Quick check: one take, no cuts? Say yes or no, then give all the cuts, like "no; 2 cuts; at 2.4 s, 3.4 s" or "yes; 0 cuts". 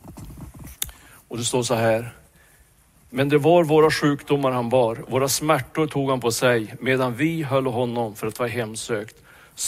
yes; 0 cuts